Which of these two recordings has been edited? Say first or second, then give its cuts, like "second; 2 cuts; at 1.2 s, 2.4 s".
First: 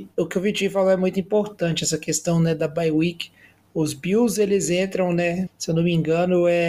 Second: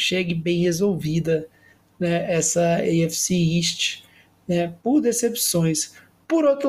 first; 1 cut; at 5.5 s